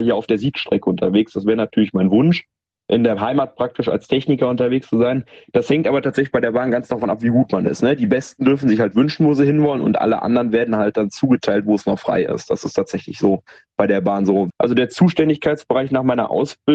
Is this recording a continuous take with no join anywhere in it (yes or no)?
no